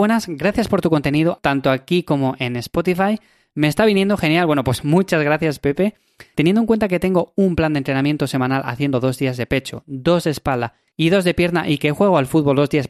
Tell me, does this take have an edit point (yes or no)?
yes